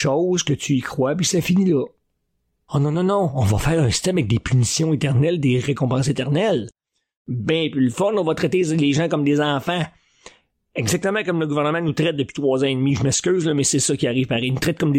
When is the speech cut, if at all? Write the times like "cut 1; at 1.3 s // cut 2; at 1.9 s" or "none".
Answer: cut 1; at 2.7 s